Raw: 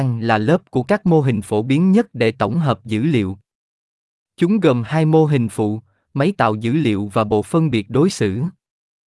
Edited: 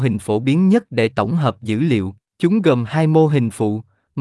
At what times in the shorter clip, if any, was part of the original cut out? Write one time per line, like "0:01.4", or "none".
0:02.3